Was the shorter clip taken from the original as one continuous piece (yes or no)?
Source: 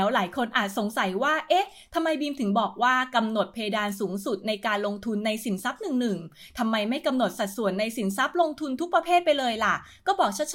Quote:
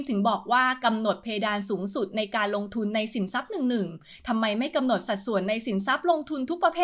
yes